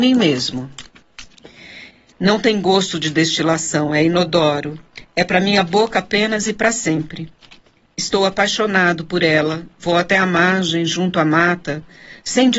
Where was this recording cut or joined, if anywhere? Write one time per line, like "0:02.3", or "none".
0:02.1